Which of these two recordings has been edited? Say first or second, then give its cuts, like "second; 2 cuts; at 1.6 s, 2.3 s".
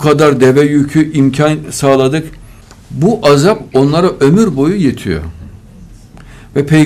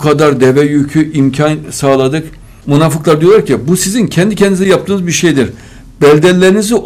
second; 1 cut; at 2.6 s